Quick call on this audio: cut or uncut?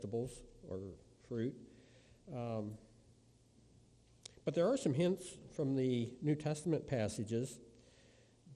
uncut